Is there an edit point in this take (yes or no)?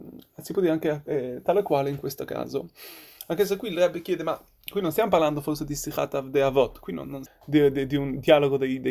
yes